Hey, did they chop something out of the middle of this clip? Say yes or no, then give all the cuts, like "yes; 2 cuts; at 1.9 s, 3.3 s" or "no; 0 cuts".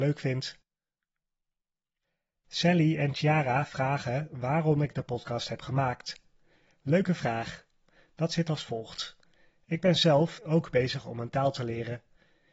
yes; 1 cut; at 10.4 s